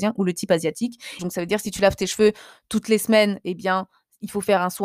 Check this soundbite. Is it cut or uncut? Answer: cut